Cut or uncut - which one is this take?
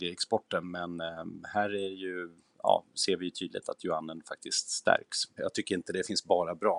cut